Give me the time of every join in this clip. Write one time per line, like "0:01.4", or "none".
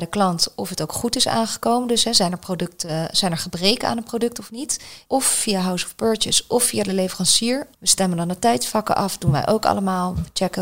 0:05.1
0:07.7